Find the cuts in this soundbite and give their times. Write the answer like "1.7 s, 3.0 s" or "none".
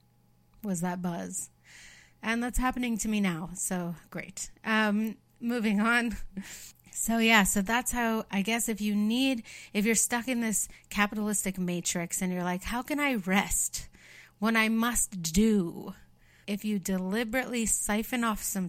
16.4 s